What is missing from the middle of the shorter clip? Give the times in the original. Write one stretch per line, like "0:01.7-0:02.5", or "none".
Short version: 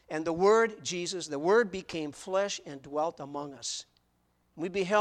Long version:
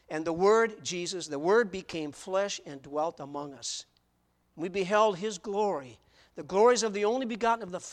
none